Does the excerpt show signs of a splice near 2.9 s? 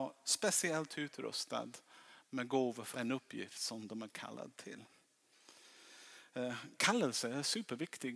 yes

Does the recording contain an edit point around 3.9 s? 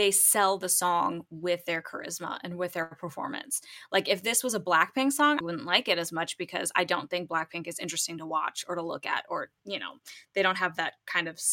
no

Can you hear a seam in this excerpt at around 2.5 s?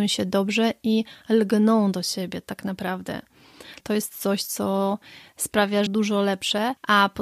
no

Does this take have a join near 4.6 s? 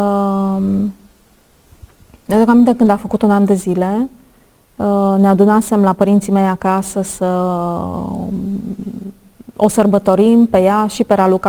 no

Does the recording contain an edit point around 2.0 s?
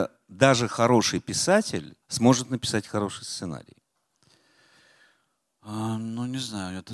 yes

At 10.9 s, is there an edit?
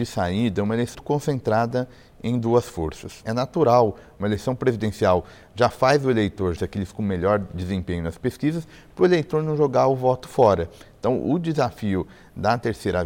no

